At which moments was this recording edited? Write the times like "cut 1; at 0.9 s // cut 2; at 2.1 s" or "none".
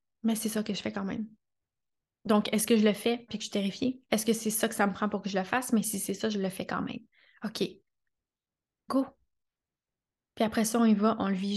cut 1; at 3.3 s